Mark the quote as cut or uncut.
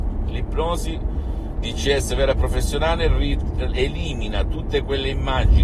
uncut